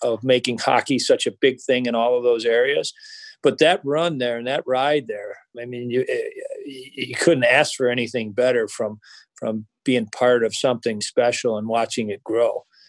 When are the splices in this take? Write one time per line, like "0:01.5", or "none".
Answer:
0:05.5
0:11.0